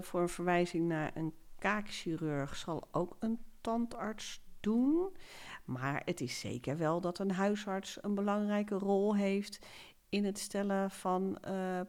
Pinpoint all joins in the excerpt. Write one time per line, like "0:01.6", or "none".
none